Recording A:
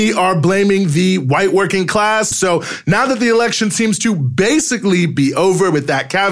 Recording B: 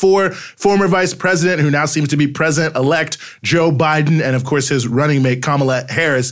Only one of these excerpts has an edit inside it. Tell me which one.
A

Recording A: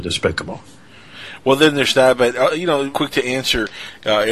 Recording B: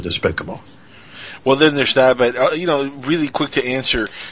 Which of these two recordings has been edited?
A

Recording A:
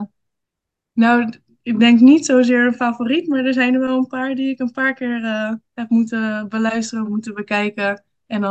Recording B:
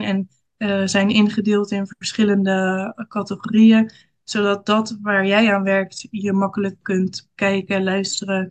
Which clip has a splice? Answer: A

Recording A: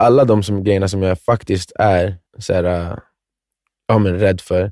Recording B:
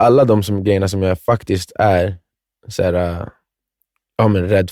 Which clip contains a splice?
A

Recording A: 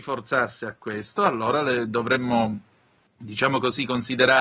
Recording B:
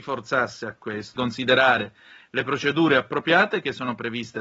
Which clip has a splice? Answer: B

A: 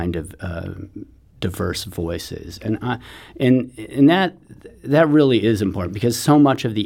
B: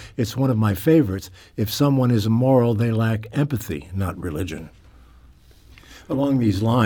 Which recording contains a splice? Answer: B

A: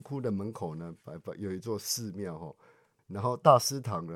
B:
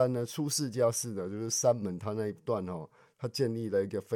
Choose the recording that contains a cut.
A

